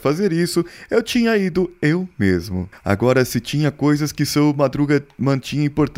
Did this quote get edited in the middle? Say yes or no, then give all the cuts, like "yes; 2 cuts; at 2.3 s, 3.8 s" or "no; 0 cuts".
no; 0 cuts